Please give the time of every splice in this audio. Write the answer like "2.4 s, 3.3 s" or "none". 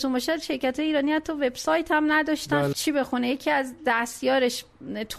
2.7 s